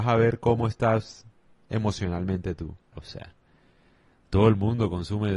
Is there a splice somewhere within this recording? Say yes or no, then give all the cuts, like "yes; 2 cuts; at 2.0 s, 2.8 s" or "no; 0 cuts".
yes; 1 cut; at 2.9 s